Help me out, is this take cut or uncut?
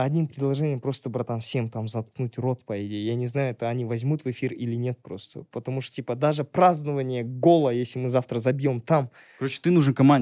cut